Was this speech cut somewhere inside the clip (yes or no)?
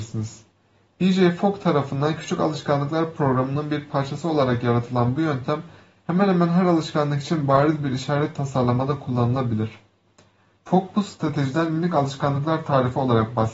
no